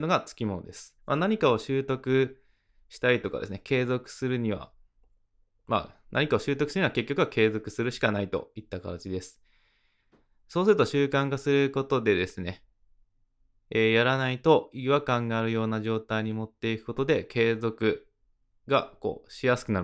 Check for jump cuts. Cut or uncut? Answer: cut